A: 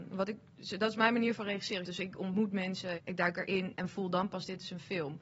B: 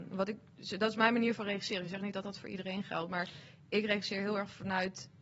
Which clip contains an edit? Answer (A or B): A